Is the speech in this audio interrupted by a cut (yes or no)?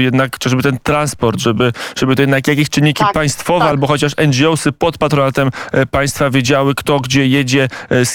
no